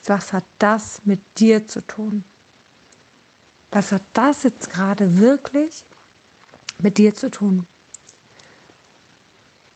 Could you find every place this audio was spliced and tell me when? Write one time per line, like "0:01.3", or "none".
none